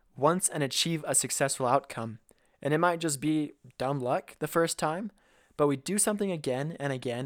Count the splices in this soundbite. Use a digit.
0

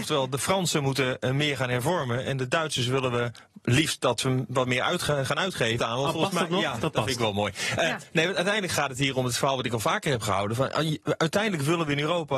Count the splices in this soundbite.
1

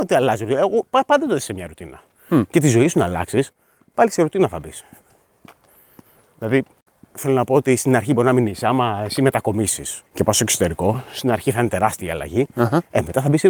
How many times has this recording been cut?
1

